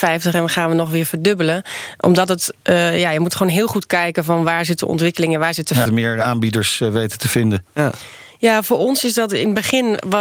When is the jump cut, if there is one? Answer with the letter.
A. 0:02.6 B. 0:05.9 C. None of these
B